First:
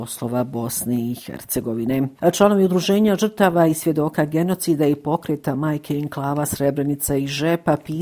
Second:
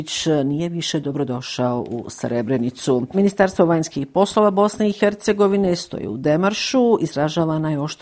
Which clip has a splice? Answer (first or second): second